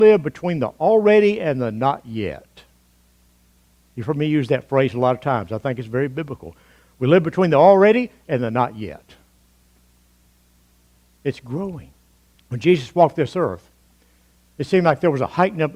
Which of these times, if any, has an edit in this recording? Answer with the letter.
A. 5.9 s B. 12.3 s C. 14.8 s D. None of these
B